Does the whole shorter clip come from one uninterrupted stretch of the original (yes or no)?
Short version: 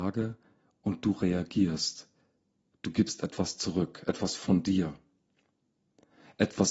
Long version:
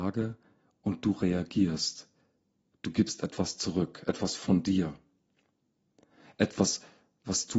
yes